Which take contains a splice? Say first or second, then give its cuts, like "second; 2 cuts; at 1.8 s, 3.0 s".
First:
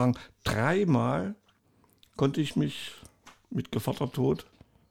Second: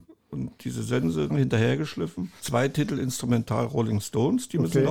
second; 2 cuts; at 1.3 s, 2.4 s